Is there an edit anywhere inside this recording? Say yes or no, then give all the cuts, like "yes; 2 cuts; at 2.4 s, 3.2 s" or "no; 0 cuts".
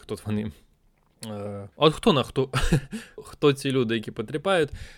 yes; 2 cuts; at 1.7 s, 3.2 s